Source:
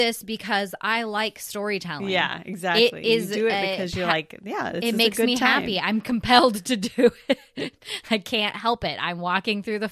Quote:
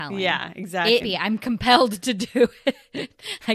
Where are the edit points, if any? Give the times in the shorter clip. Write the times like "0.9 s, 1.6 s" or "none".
1.0 s